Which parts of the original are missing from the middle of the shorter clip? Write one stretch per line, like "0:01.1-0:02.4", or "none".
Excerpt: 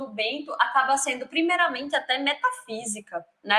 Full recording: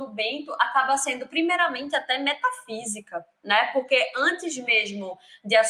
none